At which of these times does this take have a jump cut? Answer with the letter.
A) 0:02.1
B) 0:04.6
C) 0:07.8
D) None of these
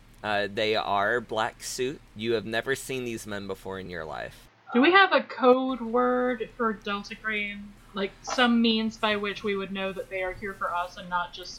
A